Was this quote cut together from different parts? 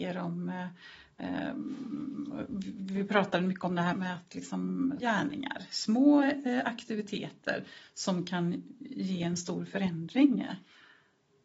yes; 2 cuts; at 3.9 s, 5.0 s

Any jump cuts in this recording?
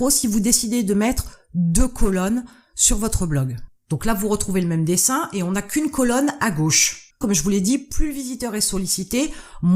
yes; 2 cuts; at 3.8 s, 7.2 s

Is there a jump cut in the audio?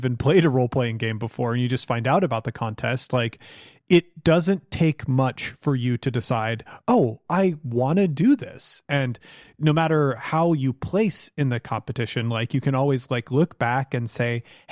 yes; 1 cut; at 8.8 s

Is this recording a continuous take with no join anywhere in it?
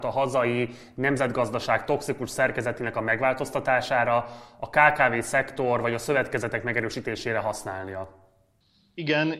yes; 0 cuts

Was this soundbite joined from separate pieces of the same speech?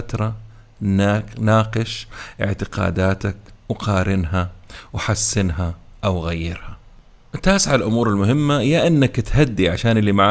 no; 0 cuts

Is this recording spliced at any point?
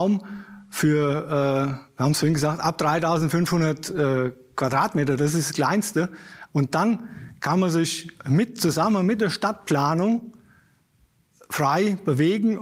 yes; 1 cut; at 6.5 s

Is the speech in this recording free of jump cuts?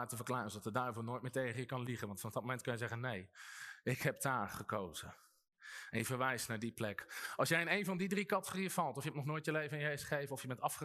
yes; 0 cuts

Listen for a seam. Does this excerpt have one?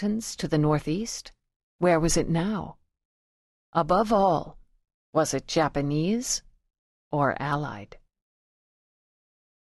yes; 1 cut; at 1.6 s

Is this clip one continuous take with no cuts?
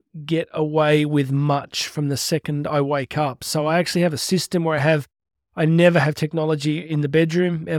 yes; 0 cuts

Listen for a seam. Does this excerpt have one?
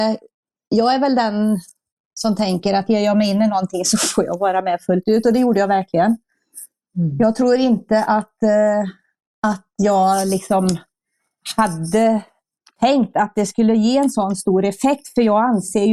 no; 0 cuts

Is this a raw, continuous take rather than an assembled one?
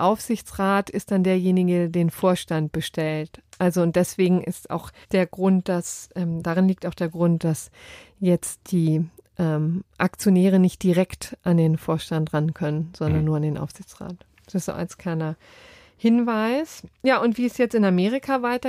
no; 1 cut; at 5.0 s

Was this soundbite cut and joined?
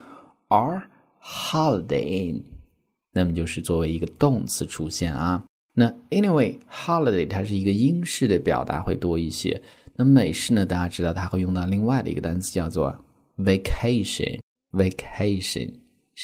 no; 0 cuts

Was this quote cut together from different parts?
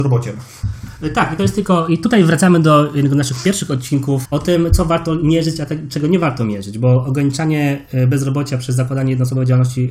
yes; 1 cut; at 4.2 s

